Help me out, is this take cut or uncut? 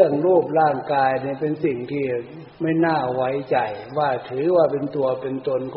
cut